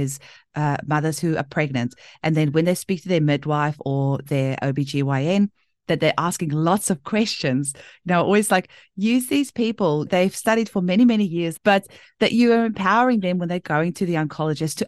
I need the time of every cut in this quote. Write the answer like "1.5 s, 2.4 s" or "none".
11.6 s

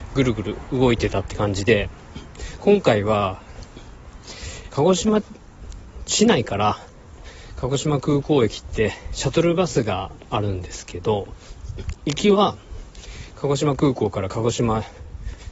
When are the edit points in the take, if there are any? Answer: 4.7 s

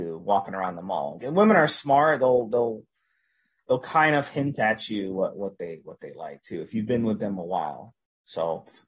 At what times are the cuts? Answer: 1.2 s

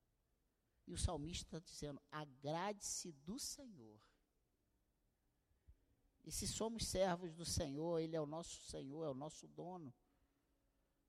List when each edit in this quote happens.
6.2 s

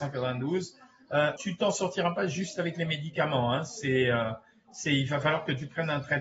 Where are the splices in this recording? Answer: 1.4 s

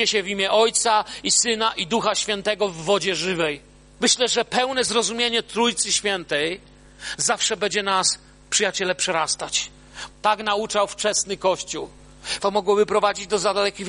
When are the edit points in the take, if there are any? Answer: 4.0 s, 10.1 s, 12.4 s

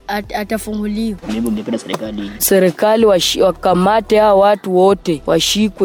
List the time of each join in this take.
1.2 s, 2.4 s

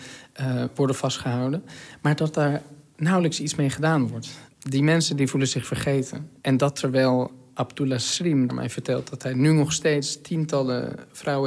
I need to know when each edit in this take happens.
6.4 s, 8.5 s

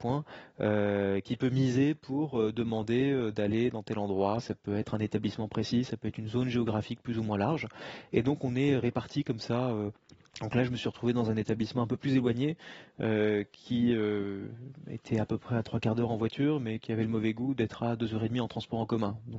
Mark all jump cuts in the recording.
none

